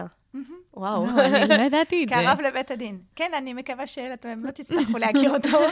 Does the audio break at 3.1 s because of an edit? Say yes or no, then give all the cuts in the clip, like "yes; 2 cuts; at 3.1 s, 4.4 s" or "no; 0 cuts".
no; 0 cuts